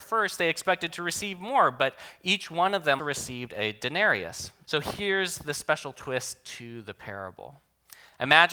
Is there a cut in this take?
yes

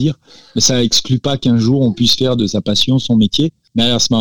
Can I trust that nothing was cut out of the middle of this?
yes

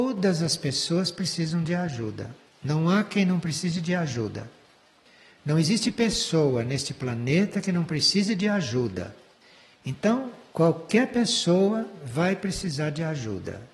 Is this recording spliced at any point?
no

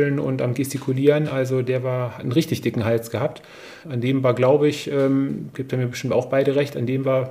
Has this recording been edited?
yes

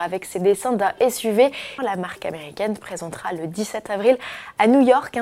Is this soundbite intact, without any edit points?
no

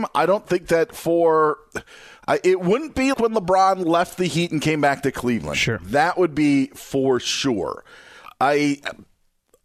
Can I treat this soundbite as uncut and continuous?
no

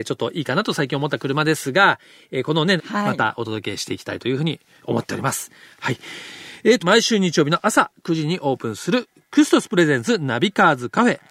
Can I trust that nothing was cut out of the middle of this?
no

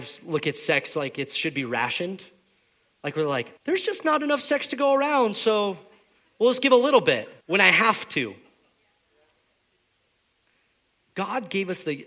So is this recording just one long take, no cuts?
no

